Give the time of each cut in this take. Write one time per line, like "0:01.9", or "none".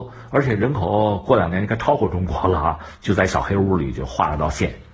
0:03.0